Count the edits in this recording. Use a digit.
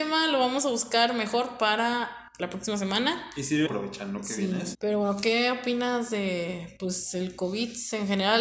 2